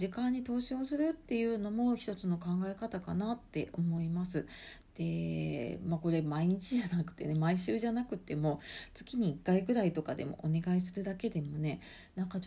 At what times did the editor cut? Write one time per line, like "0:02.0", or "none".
0:04.8